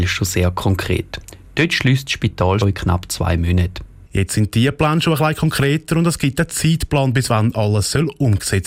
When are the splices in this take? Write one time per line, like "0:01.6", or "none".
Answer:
0:02.6
0:04.1